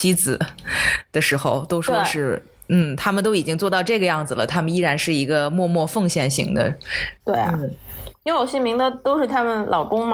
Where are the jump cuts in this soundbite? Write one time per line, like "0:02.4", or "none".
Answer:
0:07.2